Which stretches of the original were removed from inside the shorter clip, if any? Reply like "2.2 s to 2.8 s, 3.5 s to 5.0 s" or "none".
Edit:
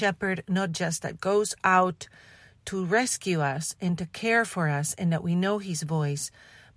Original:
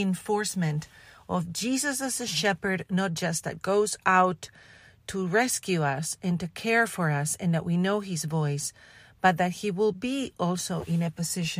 none